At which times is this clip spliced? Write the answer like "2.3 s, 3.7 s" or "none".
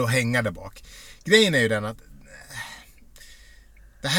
none